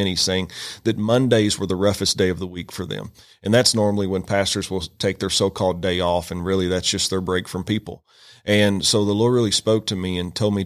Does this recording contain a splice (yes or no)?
no